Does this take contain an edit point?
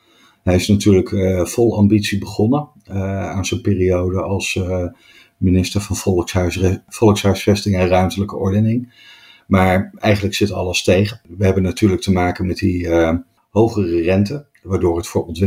no; 0 cuts

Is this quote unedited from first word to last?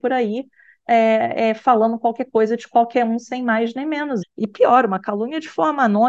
no; 1 cut; at 4.2 s

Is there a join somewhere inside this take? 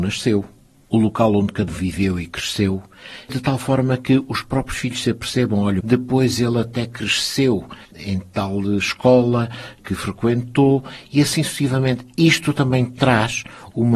yes; 2 cuts; at 1.7 s, 5.8 s

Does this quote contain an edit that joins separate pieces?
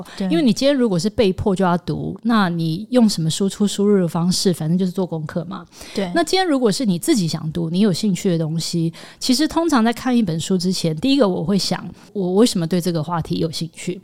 no; 0 cuts

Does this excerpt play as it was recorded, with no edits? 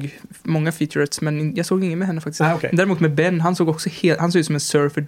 yes; 0 cuts

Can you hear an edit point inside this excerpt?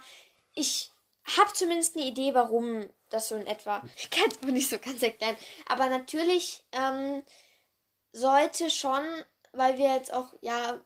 yes; 1 cut; at 3.9 s

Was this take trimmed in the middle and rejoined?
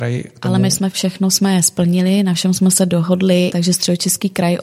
yes; 2 cuts; at 0.9 s, 3.5 s

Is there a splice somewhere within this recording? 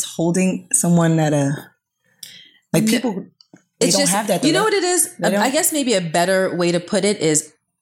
no; 0 cuts

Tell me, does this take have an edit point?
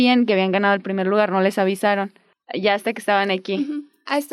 no; 0 cuts

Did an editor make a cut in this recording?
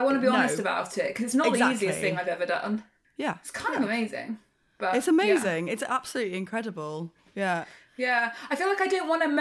yes; 1 cut; at 3.0 s

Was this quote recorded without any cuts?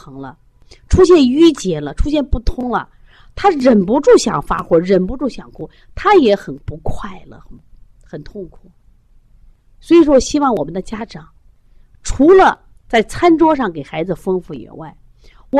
yes; 0 cuts

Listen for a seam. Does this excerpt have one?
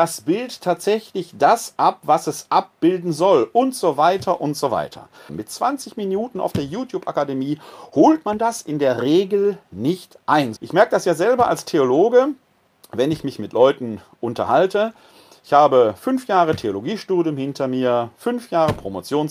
yes; 2 cuts; at 5.3 s, 10.6 s

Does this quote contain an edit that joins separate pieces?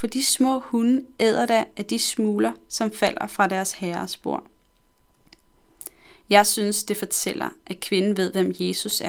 no; 0 cuts

